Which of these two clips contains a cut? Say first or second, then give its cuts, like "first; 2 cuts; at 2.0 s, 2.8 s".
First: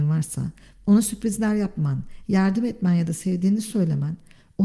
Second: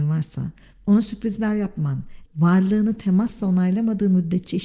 second; 1 cut; at 2.3 s